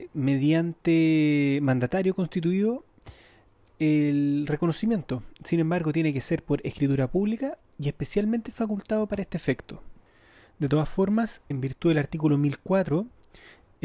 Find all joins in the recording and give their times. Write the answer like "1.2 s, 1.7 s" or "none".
11.5 s